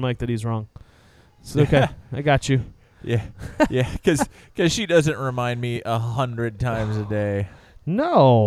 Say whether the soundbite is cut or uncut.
uncut